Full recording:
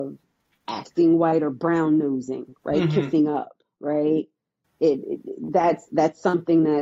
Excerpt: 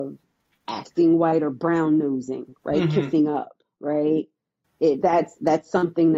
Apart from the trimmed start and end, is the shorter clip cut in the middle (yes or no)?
yes